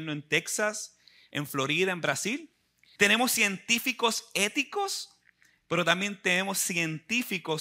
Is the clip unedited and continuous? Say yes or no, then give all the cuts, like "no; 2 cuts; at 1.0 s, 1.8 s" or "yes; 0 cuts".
no; 1 cut; at 3.0 s